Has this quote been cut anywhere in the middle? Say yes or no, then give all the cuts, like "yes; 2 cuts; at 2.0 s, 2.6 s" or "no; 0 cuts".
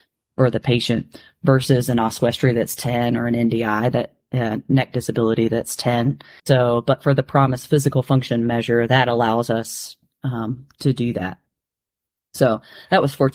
yes; 1 cut; at 6.4 s